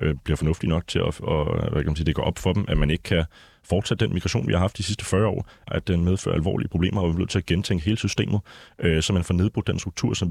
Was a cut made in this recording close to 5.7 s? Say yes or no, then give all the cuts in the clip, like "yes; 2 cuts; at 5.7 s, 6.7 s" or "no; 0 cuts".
yes; 1 cut; at 5.7 s